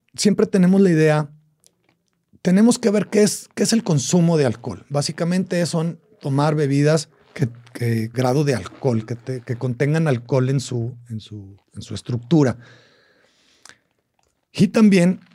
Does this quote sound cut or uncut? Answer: cut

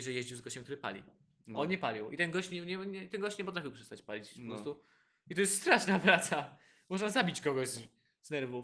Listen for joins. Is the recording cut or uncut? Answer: uncut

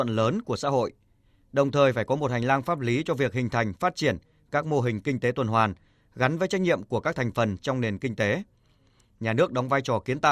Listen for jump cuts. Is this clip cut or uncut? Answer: uncut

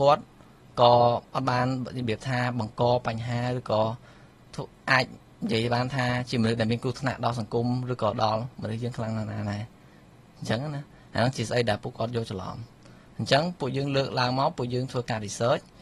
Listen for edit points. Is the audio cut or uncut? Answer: uncut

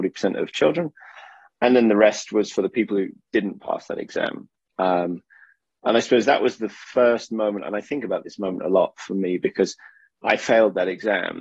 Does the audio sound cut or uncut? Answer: uncut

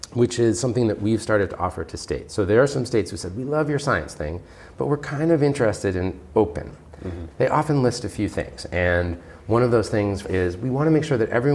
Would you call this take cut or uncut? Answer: cut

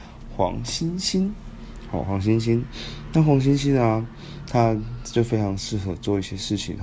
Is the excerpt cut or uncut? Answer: uncut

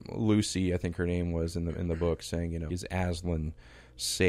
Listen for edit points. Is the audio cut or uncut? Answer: cut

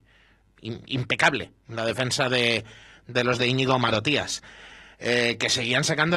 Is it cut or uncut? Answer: uncut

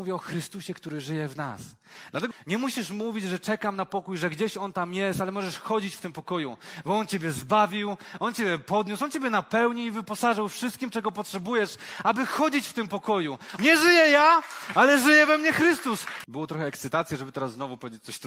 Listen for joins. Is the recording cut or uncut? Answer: cut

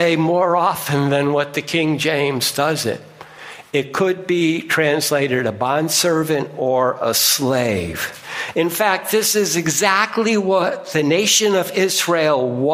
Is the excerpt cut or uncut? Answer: uncut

